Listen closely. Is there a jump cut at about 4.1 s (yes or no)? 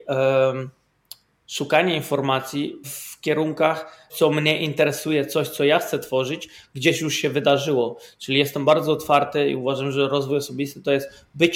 yes